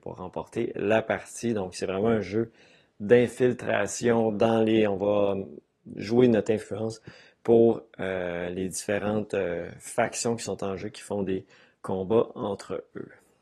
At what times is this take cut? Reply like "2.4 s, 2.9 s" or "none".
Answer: none